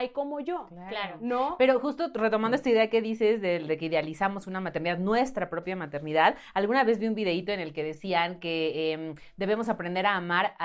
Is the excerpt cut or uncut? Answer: uncut